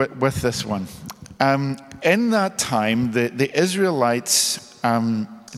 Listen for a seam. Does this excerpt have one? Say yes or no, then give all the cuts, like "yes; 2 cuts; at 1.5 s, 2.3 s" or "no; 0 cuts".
no; 0 cuts